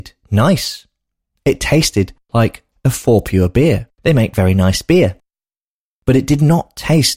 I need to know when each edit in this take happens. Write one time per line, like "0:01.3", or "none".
0:03.9